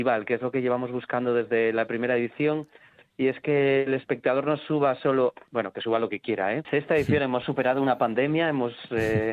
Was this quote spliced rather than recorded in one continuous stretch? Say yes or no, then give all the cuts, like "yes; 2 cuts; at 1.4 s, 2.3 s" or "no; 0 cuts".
yes; 1 cut; at 6.6 s